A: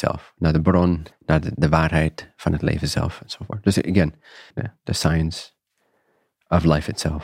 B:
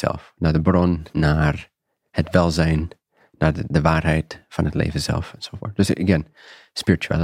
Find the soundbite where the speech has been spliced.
A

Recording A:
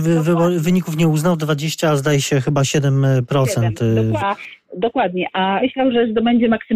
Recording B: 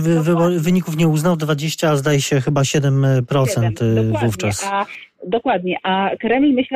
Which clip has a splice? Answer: A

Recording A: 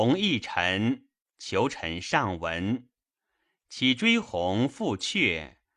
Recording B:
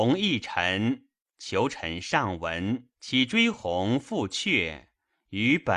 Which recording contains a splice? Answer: B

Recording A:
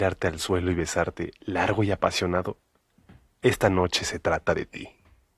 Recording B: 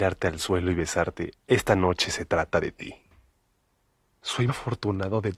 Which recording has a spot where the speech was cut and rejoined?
B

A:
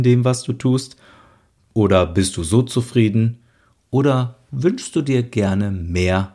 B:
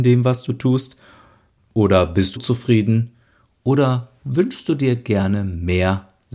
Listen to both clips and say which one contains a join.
B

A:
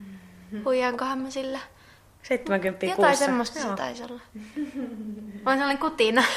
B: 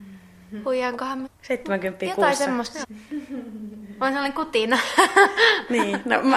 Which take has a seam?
B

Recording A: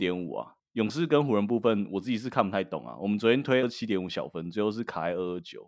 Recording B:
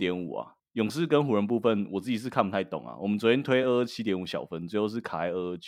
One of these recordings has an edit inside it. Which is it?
A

